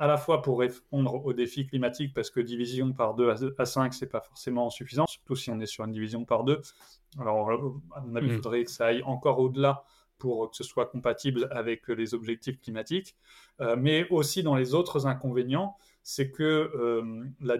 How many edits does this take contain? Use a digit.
2